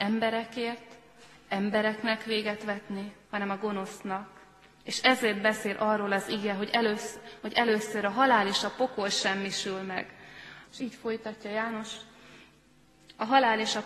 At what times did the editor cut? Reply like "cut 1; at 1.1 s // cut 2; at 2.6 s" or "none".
cut 1; at 3.2 s // cut 2; at 10.6 s